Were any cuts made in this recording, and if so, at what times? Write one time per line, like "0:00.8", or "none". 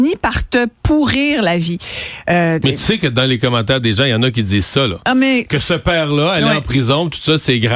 none